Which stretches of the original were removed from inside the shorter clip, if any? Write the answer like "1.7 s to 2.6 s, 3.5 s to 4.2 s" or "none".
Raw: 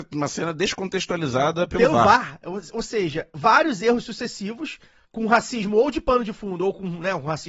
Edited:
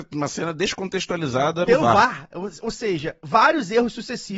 1.7 s to 1.8 s